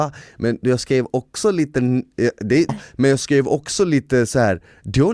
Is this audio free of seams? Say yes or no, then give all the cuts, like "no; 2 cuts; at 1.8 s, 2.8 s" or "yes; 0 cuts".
no; 1 cut; at 2.7 s